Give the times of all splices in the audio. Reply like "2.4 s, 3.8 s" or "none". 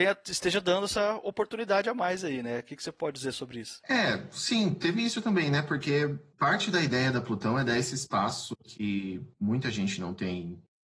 none